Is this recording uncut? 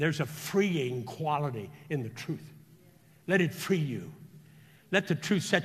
yes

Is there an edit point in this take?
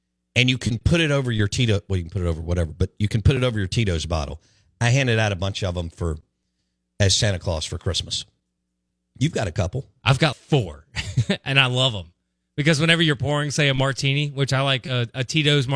yes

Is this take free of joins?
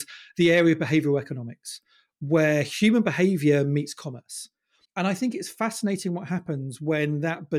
no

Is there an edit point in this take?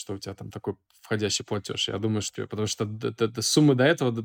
yes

